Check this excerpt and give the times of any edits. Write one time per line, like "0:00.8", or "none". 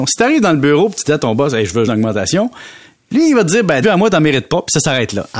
0:01.8
0:03.8